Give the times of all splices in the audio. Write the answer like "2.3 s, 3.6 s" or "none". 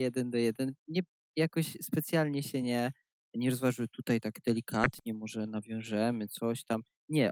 none